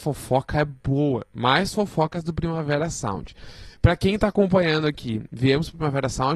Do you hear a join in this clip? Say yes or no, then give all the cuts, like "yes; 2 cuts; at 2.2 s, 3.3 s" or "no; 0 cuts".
no; 0 cuts